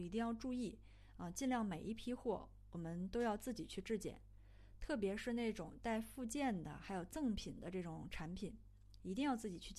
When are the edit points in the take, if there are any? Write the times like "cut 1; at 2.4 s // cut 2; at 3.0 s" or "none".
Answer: none

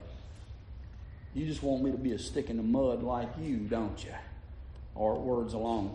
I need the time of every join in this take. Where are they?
none

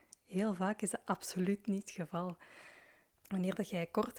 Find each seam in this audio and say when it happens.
cut 1; at 3.2 s

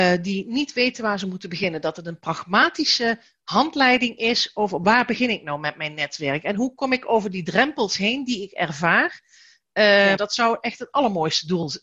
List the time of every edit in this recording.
cut 1; at 10.2 s

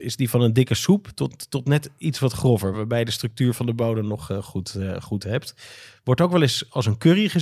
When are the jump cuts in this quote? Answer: none

